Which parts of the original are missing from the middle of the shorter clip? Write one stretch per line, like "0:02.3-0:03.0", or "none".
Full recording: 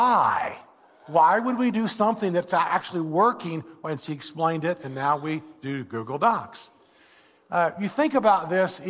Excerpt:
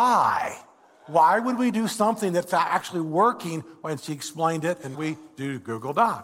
0:04.9-0:05.2